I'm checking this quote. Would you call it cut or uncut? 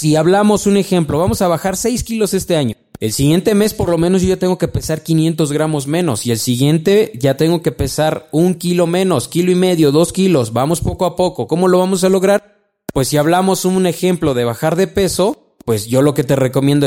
uncut